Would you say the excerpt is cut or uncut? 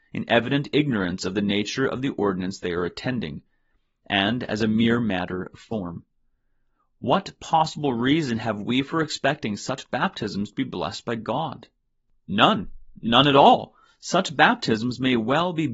uncut